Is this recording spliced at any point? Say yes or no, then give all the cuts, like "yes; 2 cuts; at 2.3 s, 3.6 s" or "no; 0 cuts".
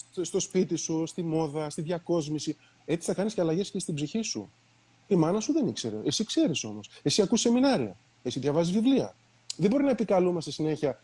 no; 0 cuts